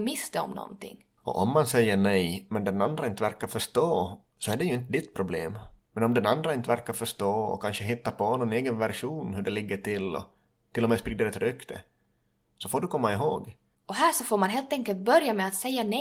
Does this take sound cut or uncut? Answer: cut